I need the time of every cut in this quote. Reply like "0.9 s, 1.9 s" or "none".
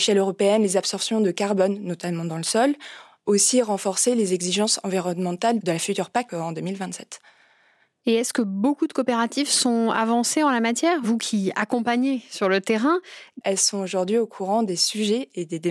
6.3 s, 13.4 s